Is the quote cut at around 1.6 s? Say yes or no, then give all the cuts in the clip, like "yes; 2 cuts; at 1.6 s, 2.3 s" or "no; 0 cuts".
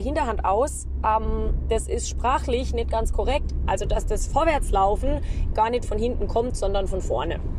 no; 2 cuts; at 3.6 s, 5.5 s